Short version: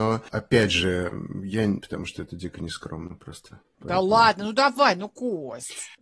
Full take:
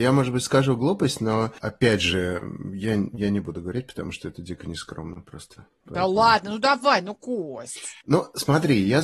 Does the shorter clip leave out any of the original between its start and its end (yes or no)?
yes